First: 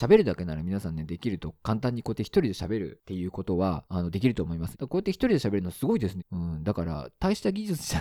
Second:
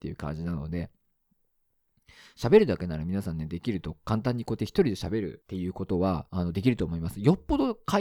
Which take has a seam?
first; 2 cuts; at 4.7 s, 6.2 s

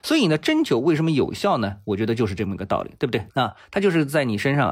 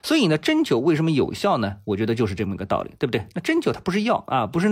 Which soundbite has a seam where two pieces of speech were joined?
first; 1 cut; at 3.3 s

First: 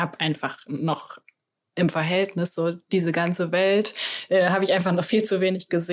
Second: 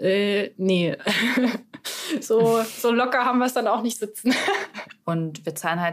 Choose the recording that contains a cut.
second; 1 cut; at 5.0 s

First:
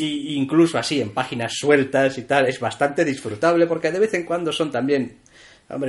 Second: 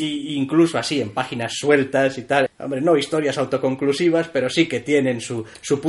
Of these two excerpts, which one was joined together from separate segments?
second; 1 cut; at 2.5 s

